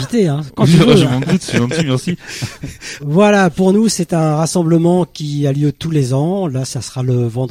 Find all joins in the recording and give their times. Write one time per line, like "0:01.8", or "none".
0:03.0